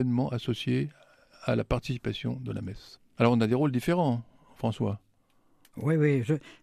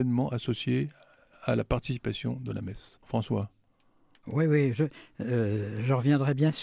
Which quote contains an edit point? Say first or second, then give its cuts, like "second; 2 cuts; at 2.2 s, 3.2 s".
second; 1 cut; at 3.0 s